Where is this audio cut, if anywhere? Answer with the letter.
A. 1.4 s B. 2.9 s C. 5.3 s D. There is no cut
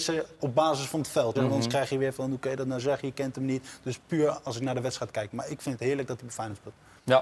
A